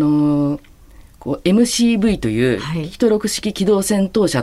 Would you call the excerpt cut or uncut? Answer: uncut